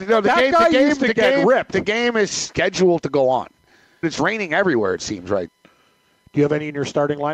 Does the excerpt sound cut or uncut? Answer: cut